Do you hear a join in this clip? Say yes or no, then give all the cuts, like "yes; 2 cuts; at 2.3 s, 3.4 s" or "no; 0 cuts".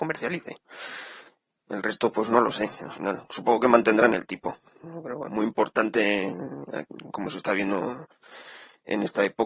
yes; 1 cut; at 5.3 s